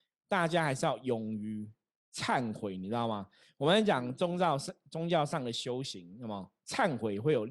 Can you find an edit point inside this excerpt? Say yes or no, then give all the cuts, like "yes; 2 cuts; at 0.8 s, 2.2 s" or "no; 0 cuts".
no; 0 cuts